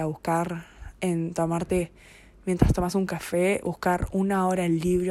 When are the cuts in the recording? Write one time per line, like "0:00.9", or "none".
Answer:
none